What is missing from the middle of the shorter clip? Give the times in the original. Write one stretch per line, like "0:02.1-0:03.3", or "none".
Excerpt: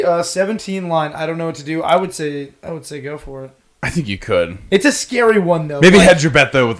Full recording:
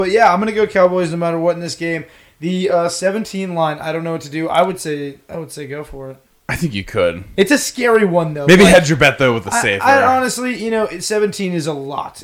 none